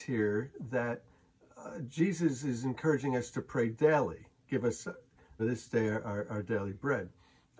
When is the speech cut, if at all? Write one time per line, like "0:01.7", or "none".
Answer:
0:05.4